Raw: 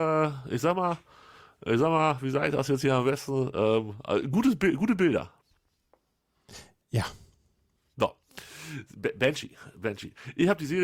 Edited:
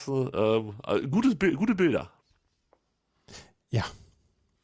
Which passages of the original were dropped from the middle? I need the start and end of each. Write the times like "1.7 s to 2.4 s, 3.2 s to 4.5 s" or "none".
none